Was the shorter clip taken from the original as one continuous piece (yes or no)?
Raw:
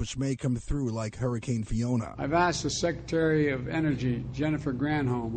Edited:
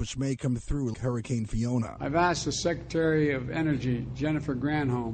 no